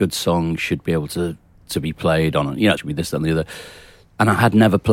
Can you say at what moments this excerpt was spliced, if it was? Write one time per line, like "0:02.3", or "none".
0:02.8